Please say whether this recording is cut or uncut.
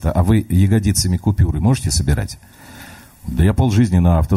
uncut